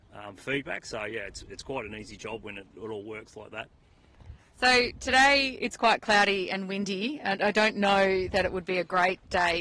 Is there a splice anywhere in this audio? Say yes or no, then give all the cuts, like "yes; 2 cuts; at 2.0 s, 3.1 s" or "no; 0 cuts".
no; 0 cuts